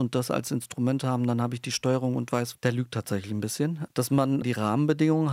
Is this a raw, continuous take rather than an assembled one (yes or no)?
no